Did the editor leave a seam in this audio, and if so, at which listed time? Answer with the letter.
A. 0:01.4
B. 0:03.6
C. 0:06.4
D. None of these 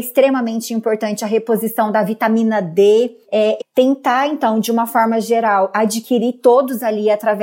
B